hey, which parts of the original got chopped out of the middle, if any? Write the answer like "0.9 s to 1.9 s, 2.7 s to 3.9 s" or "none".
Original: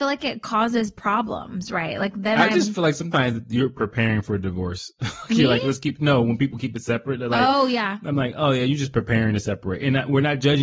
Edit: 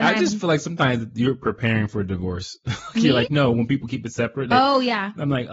5.6 s to 6.0 s, 7.2 s to 7.4 s